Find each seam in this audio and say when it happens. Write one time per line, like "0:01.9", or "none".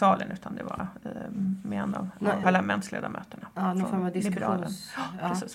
0:02.4